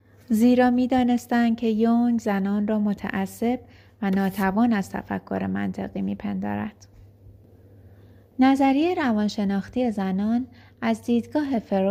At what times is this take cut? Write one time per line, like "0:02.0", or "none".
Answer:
none

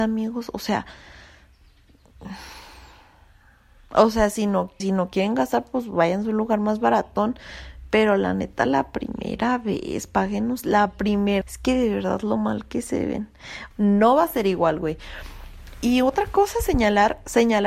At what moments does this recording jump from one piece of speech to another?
0:04.8
0:11.4
0:13.7

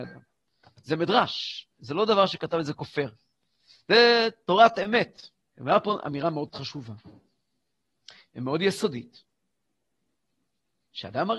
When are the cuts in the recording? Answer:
0:05.5

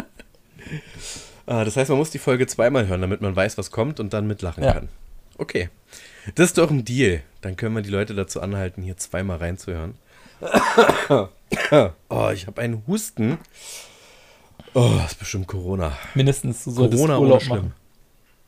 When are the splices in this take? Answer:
0:05.3

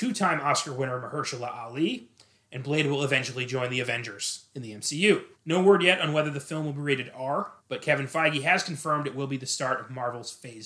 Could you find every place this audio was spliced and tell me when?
0:05.3
0:07.6

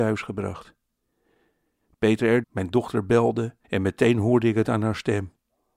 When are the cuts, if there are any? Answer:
0:02.4
0:03.6

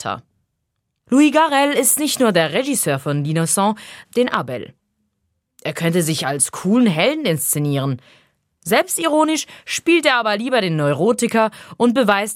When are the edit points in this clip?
0:04.0

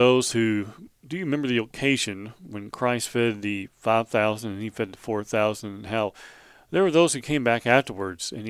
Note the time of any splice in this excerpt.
none

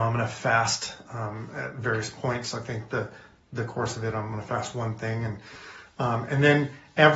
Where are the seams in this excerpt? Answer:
none

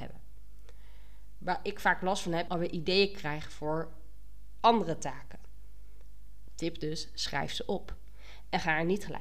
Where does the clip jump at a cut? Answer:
0:02.5
0:06.5

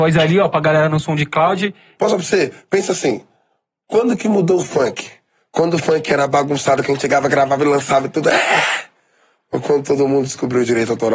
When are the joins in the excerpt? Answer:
0:02.0

